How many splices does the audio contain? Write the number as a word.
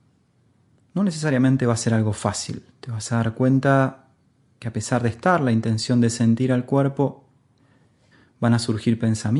zero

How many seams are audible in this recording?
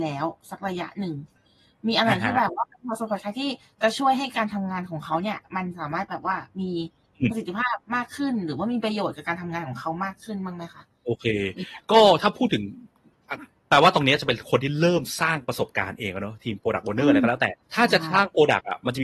one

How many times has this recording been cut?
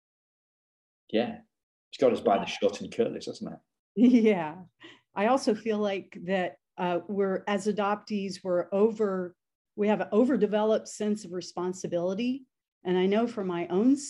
one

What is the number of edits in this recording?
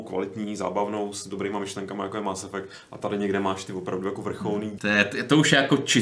one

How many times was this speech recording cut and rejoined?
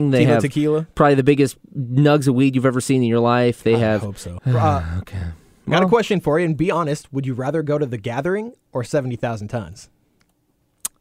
one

